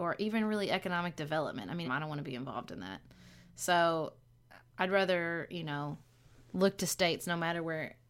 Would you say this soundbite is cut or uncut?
cut